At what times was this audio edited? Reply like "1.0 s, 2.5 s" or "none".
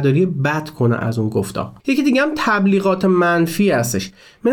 1.8 s

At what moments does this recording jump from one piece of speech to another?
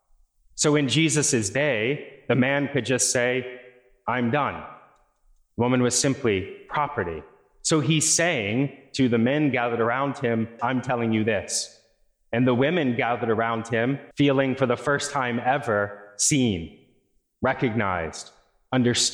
10.6 s, 14.1 s

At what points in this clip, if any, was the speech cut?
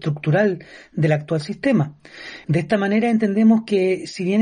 2.4 s

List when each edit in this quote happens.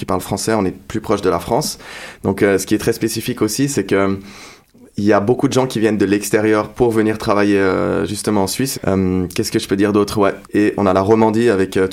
8.7 s, 10.4 s

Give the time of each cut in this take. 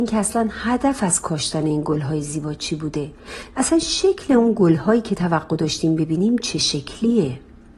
3.5 s

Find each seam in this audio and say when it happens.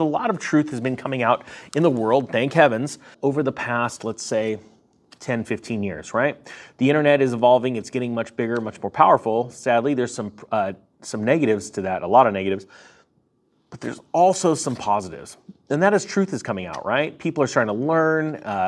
3.1 s

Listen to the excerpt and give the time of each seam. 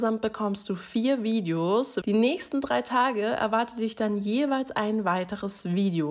2.0 s

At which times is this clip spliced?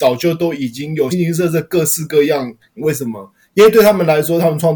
1.1 s, 2.8 s

